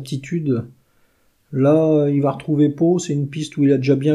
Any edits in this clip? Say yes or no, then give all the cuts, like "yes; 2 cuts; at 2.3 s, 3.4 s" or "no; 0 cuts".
no; 0 cuts